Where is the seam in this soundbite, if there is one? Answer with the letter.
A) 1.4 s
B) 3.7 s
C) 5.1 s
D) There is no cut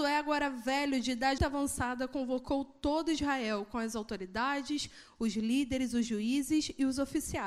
A